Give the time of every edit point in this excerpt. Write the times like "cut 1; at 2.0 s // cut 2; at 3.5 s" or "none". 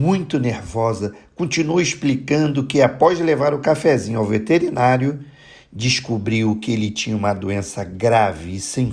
none